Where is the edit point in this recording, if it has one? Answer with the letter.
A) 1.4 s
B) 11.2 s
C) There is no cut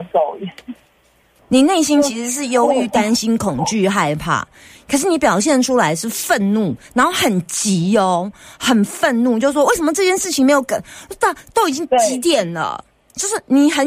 A